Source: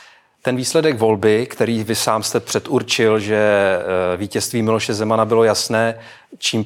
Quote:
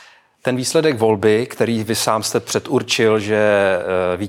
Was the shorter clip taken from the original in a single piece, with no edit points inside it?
yes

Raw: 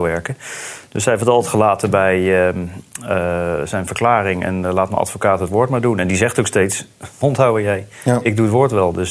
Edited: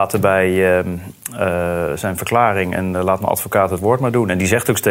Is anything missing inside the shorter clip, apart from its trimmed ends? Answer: no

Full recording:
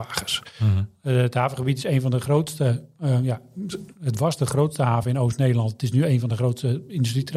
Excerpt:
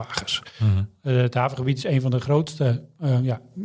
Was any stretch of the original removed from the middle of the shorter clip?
no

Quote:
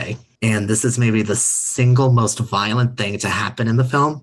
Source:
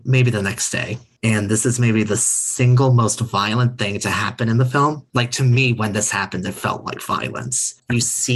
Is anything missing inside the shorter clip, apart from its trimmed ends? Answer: no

